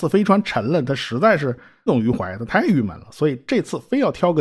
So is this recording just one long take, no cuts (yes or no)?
no